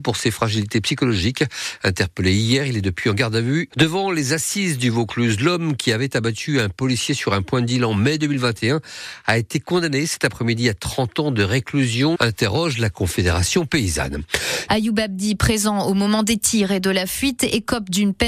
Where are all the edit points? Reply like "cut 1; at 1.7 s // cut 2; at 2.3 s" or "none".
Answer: cut 1; at 3.7 s // cut 2; at 12.2 s // cut 3; at 14.7 s